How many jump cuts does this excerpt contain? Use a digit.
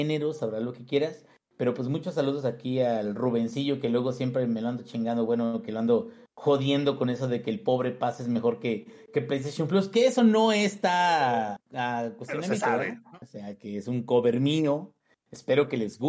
2